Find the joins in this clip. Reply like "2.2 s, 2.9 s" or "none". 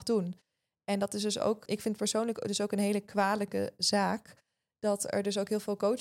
1.7 s

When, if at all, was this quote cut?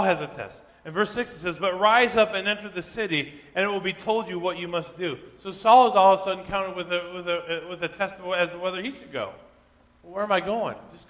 none

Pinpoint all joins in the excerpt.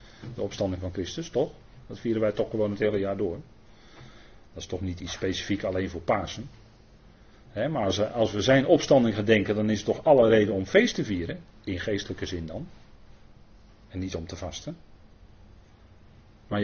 none

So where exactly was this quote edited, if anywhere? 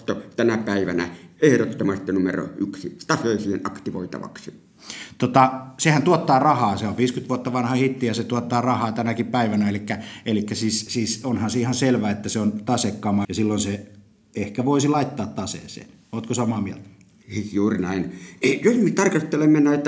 10.9 s, 13.2 s

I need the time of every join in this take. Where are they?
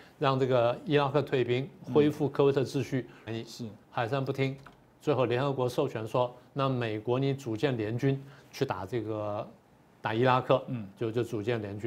3.3 s

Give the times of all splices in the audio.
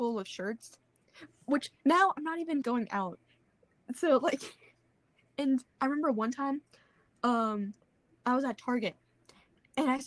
2.6 s

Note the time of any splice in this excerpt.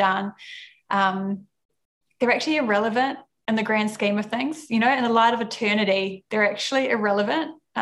none

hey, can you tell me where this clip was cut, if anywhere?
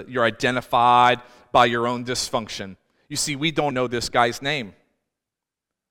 3.7 s

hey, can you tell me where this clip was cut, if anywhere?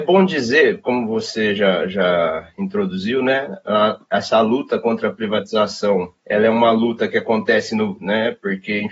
6.2 s, 8.0 s

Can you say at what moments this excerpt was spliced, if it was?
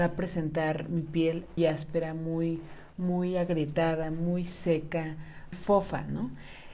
1.6 s, 5.5 s

